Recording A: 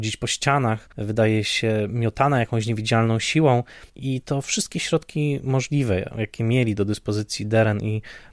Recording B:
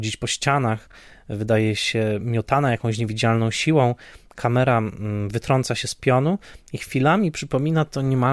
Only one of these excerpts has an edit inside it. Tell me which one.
A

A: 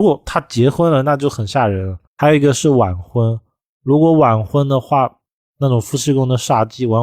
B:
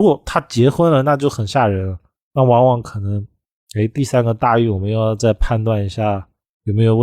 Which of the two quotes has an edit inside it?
A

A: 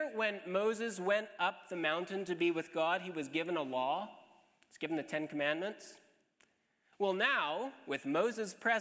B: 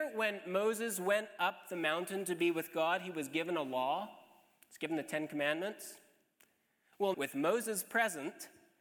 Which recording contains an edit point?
B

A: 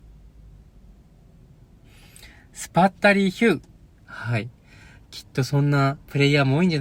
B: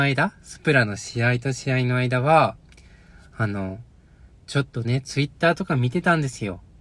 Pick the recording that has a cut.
A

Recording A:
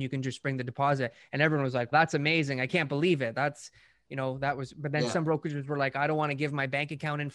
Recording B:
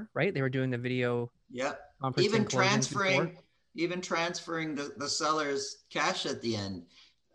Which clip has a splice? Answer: A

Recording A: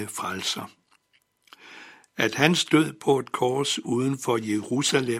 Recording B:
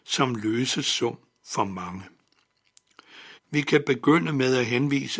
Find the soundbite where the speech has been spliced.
B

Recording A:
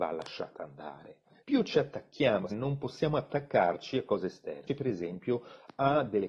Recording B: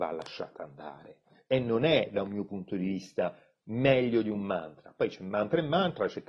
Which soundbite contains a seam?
A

